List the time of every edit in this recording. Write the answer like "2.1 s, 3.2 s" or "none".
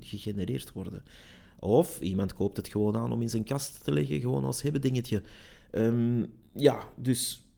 none